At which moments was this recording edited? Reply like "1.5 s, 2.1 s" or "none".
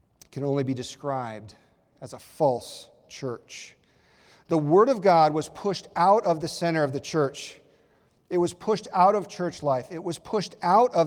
none